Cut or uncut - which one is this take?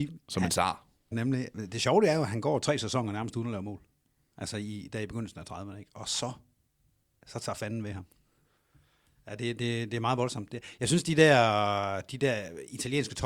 cut